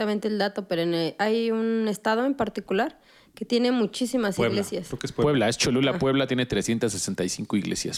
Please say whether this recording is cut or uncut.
uncut